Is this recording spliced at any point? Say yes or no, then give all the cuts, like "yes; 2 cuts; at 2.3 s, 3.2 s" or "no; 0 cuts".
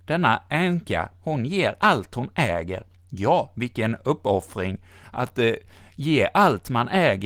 no; 0 cuts